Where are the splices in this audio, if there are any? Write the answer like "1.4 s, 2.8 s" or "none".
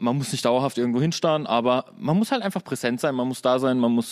none